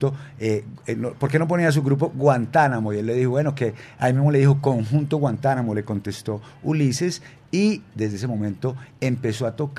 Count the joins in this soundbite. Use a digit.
0